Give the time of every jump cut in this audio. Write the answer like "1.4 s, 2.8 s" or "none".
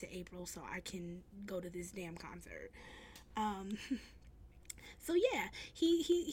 none

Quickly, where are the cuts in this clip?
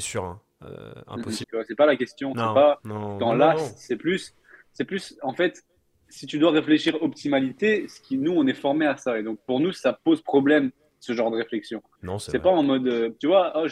1.4 s, 12.0 s

